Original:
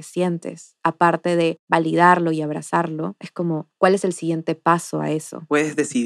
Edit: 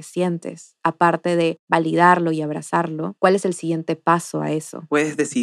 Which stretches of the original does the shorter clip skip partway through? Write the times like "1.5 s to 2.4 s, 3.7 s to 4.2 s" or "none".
3.2 s to 3.8 s